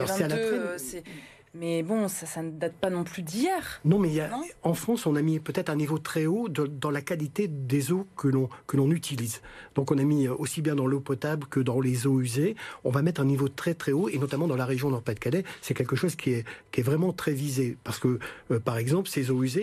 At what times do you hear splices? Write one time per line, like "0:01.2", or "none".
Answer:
none